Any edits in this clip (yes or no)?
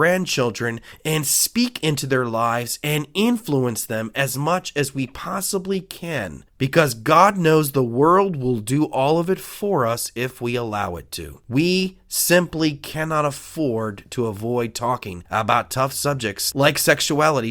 yes